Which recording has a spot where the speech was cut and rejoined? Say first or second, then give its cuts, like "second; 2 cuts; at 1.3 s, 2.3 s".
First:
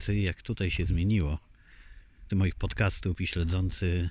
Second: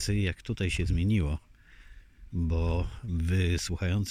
first; 1 cut; at 2.3 s